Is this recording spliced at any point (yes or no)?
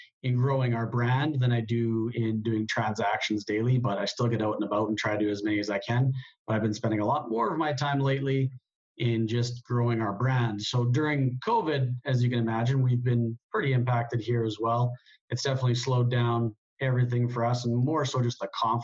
no